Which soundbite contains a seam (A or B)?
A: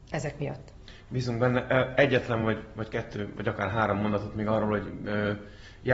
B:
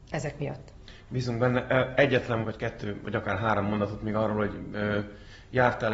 B